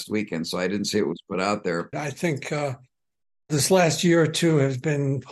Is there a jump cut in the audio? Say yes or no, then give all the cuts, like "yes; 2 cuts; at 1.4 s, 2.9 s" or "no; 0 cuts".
yes; 1 cut; at 1.9 s